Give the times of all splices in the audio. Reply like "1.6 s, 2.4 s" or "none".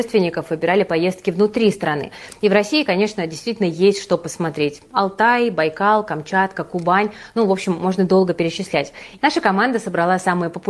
9.2 s